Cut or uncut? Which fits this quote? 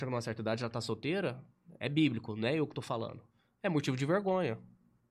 uncut